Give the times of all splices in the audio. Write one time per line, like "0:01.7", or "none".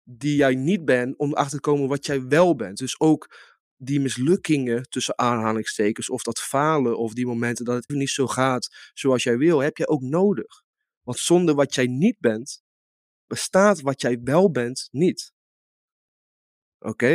0:07.9